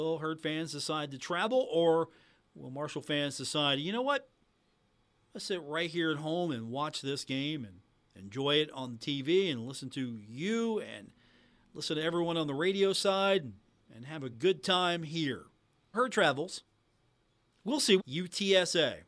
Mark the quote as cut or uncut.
cut